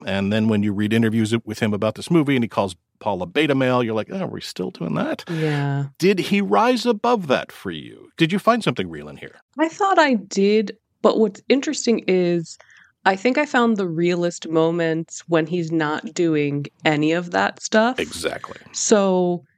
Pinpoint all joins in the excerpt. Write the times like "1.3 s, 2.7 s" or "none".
none